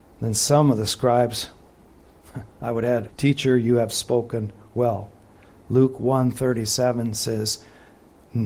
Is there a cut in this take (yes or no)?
yes